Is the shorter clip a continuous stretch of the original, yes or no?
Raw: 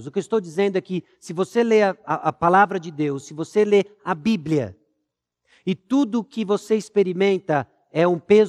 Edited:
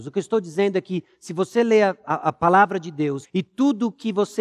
no